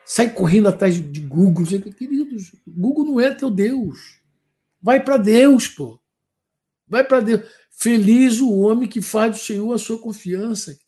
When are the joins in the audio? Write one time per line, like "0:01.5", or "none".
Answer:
none